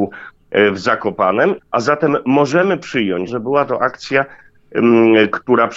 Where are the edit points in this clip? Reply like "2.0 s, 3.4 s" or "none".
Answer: 1.6 s, 3.3 s